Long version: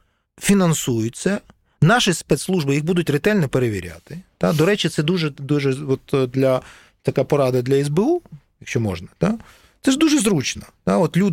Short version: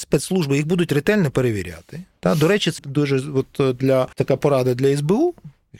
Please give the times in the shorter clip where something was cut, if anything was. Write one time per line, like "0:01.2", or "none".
0:02.8
0:04.1